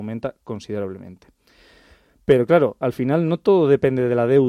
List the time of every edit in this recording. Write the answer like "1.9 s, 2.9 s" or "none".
none

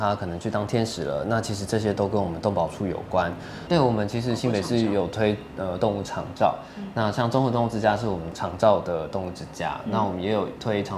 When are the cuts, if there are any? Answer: 3.7 s

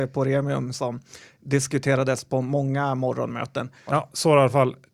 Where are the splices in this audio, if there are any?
3.9 s

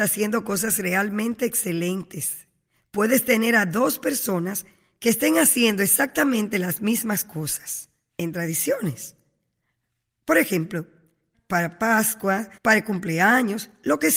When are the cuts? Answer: 11.3 s, 12.6 s

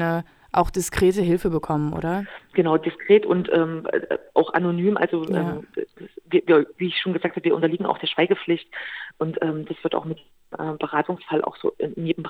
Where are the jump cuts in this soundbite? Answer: none

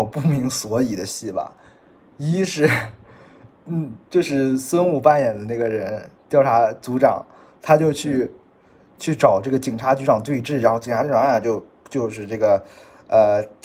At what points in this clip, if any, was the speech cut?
none

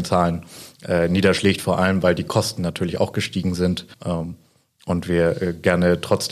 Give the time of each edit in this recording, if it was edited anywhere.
3.9 s

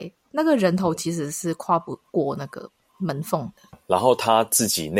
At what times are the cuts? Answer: 3.7 s

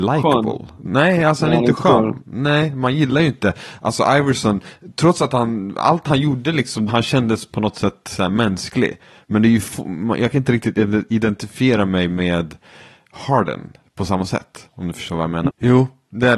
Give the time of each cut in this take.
6.9 s, 15.5 s

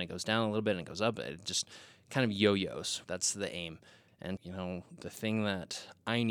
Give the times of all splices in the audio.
3.0 s, 4.4 s

